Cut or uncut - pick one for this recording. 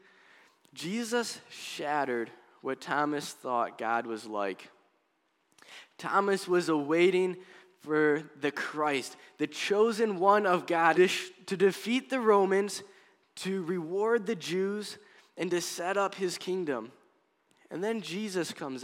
cut